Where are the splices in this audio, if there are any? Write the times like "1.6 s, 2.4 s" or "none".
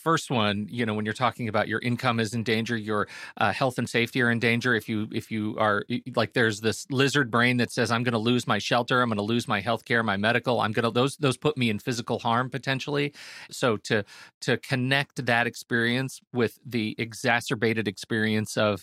13.5 s

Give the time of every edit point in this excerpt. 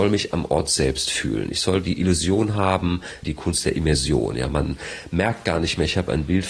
3.2 s

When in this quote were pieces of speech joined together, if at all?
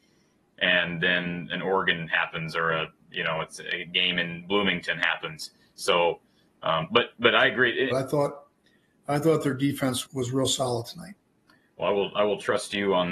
7.9 s, 10.0 s

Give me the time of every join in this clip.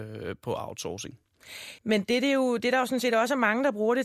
1.8 s

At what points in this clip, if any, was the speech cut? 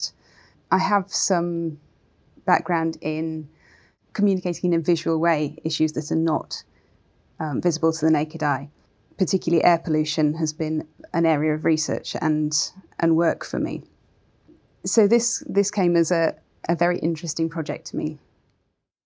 none

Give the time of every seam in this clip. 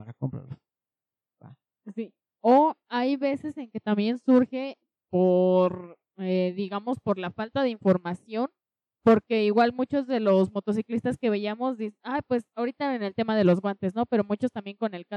none

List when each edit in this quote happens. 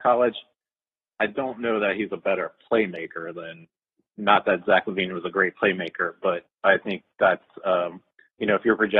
none

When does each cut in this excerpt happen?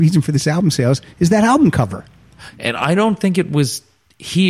2.5 s

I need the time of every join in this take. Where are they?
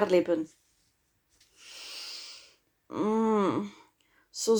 2.8 s

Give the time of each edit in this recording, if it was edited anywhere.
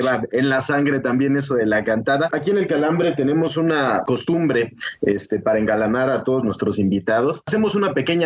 2.3 s

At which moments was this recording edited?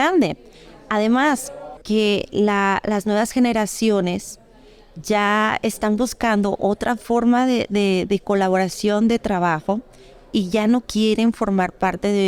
1.8 s

